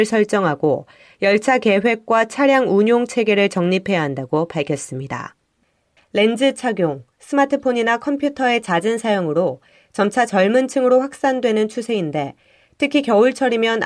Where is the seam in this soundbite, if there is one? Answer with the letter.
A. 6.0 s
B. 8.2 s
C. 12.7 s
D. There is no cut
A